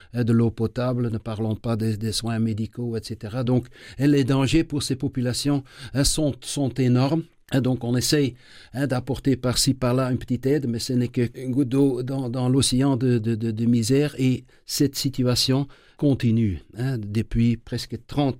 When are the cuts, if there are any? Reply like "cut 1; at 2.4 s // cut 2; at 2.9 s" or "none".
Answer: none